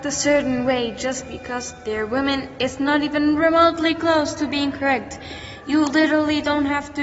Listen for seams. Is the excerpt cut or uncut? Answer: uncut